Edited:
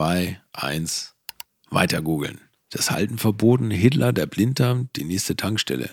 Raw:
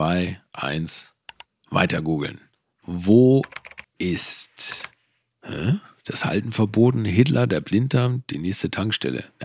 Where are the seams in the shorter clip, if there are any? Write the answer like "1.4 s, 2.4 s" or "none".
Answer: 2.7 s